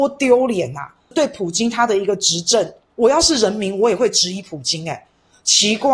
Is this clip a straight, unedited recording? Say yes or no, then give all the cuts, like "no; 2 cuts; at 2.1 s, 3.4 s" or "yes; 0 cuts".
yes; 0 cuts